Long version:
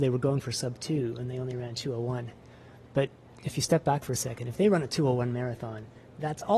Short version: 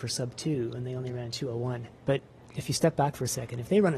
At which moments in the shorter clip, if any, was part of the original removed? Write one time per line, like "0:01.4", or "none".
0:02.0